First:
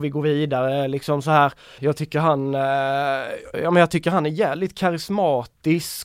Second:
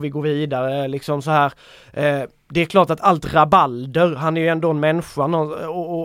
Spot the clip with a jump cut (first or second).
first